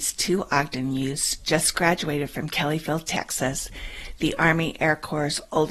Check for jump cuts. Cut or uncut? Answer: uncut